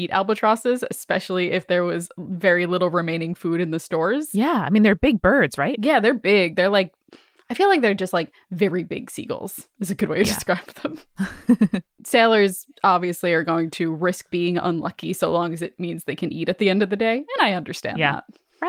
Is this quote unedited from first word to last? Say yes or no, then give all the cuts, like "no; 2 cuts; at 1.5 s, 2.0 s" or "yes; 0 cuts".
yes; 0 cuts